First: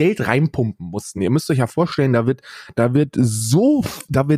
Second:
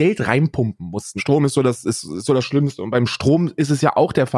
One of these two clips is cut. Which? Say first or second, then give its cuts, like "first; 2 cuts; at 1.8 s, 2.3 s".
second; 1 cut; at 1.2 s